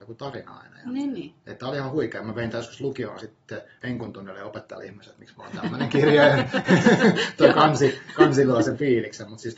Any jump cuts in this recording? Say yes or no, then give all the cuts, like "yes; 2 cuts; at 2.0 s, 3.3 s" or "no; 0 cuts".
no; 0 cuts